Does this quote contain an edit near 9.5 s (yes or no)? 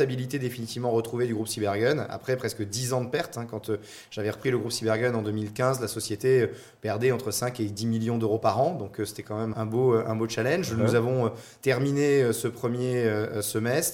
yes